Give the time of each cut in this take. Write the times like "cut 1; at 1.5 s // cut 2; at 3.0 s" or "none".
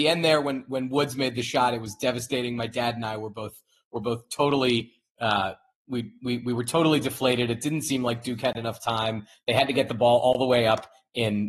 none